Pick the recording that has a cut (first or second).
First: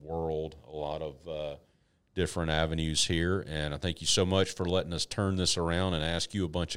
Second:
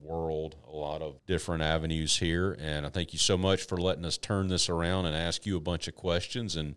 second